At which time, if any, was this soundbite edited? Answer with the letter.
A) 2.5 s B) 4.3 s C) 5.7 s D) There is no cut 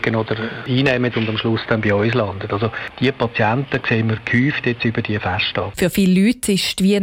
C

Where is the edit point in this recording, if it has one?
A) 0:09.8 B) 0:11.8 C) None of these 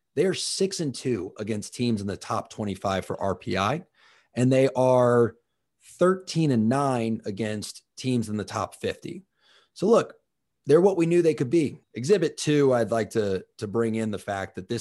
B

